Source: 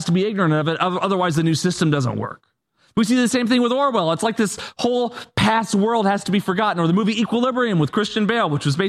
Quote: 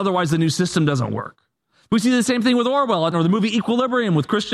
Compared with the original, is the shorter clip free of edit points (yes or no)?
no